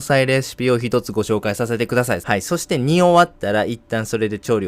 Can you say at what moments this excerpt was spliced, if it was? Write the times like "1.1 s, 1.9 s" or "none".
2.2 s